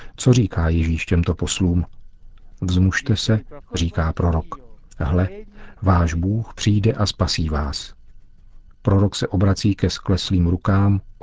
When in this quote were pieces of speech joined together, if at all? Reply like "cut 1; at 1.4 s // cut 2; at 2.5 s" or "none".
cut 1; at 2.6 s // cut 2; at 3.6 s // cut 3; at 8.7 s